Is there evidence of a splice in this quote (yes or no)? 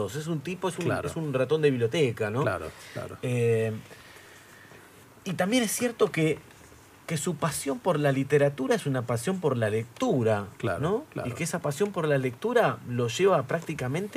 no